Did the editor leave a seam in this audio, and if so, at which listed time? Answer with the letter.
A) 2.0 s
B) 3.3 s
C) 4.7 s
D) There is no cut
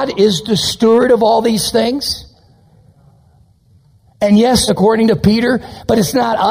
C